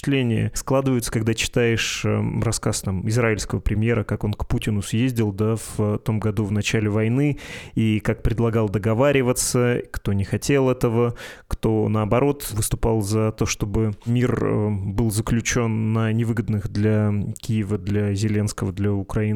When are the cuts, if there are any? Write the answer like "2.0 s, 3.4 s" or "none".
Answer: none